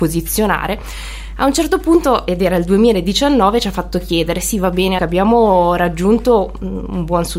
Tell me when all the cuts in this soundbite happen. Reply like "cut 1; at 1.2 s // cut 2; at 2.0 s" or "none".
cut 1; at 5.0 s